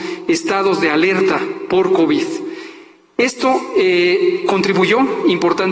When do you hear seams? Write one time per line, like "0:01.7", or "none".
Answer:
none